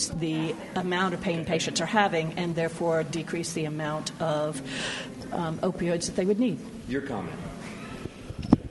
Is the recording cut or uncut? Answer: uncut